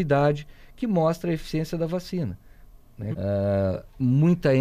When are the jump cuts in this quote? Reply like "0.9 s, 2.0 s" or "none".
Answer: 3.1 s